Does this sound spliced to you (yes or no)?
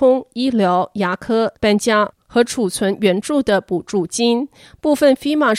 yes